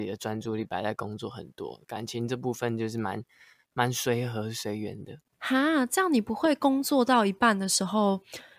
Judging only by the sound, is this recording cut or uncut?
uncut